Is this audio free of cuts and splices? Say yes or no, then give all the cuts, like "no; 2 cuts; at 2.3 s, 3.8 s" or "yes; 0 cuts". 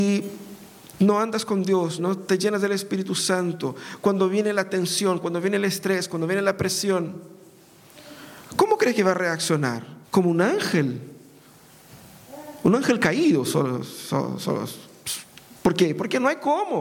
no; 2 cuts; at 2.0 s, 10.0 s